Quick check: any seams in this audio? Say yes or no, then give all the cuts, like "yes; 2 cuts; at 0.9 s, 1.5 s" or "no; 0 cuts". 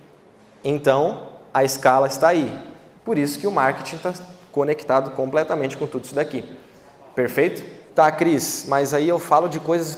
yes; 2 cuts; at 3.0 s, 7.9 s